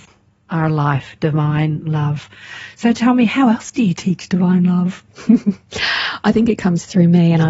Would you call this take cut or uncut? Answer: uncut